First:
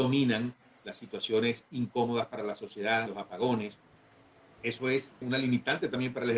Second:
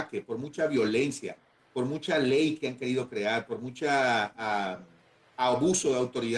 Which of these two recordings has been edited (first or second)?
first